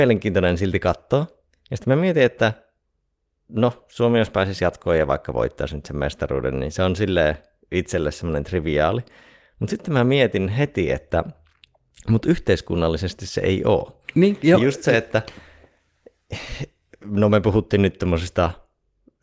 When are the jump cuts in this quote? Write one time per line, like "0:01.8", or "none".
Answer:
0:14.6